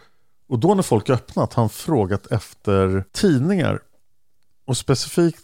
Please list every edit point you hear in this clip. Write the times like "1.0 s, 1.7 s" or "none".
3.1 s